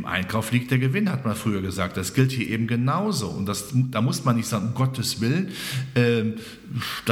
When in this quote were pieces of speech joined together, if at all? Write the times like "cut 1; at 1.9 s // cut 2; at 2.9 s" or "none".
none